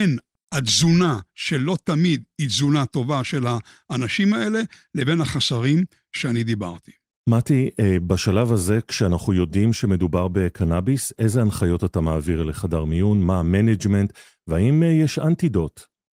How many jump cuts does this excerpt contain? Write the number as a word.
zero